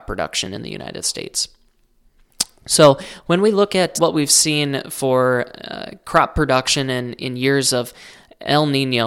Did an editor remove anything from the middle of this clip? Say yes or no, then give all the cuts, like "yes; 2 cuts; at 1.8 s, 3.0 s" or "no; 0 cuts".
yes; 1 cut; at 4.0 s